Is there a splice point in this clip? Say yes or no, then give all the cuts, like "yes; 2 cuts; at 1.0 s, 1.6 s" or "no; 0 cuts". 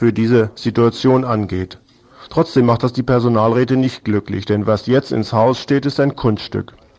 yes; 1 cut; at 2.3 s